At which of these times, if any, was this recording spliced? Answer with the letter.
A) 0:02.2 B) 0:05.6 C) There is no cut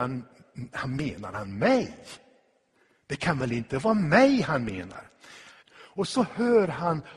B